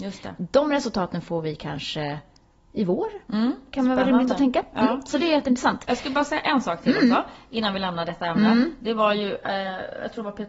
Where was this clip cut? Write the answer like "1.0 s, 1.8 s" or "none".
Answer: none